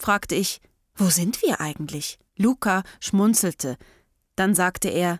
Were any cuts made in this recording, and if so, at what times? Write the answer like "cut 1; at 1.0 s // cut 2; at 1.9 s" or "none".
cut 1; at 2.3 s